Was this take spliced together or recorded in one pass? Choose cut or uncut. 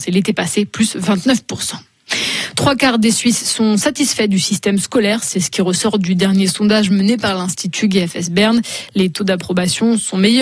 uncut